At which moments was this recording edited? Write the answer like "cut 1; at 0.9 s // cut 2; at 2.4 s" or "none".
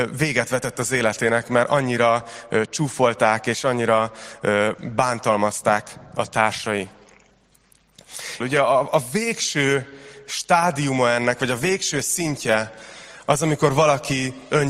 cut 1; at 8.4 s